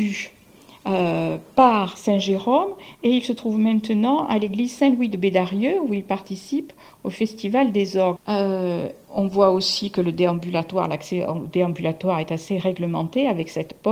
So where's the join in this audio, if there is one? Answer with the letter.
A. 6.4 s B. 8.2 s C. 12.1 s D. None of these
B